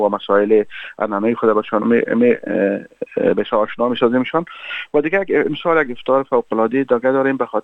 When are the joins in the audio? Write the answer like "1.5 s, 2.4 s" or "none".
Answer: 1.8 s

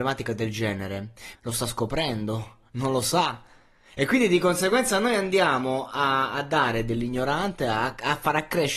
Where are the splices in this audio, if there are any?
1.3 s

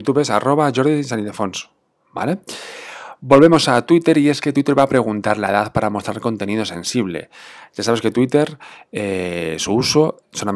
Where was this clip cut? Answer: none

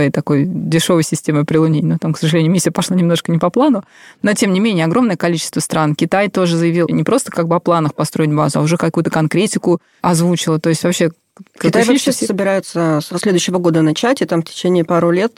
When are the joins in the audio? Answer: none

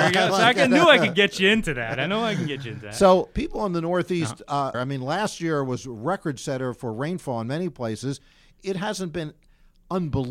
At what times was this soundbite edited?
4.7 s

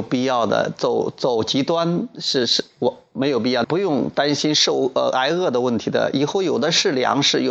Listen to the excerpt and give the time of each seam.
3.6 s

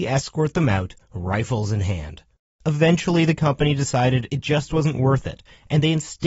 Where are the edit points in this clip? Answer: none

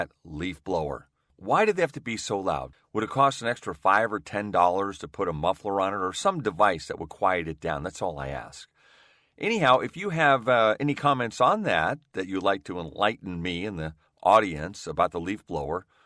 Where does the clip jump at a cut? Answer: none

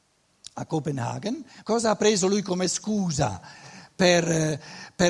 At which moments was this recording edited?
1.6 s

